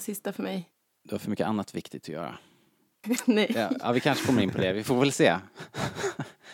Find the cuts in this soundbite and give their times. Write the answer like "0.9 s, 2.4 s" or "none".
3.0 s